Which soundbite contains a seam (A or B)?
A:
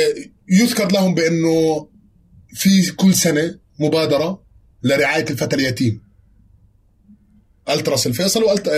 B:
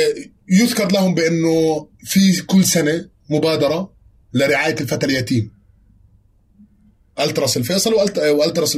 B